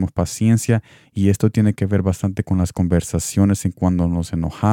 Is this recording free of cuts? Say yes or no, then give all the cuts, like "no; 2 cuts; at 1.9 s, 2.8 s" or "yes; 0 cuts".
no; 1 cut; at 1.0 s